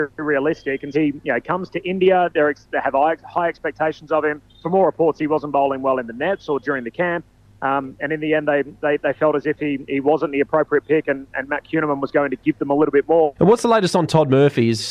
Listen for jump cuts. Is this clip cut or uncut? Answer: cut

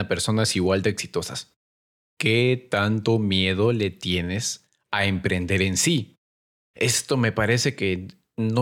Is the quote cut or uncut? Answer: cut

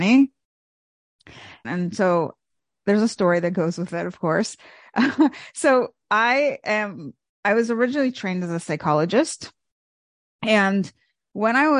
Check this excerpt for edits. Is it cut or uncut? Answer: cut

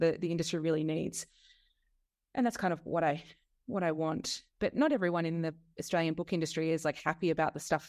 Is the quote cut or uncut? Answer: uncut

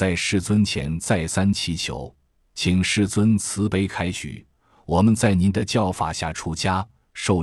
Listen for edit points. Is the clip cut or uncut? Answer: uncut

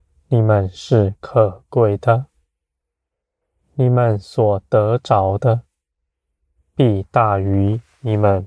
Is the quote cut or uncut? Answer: uncut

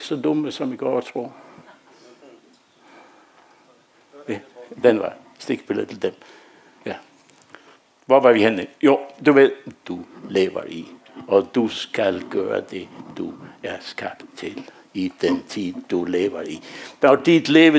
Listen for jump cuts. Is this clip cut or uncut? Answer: cut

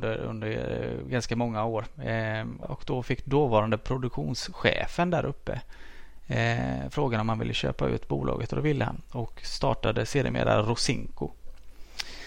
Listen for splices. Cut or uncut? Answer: cut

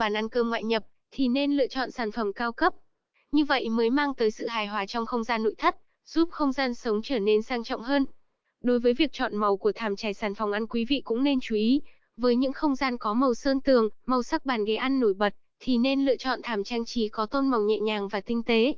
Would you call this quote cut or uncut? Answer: uncut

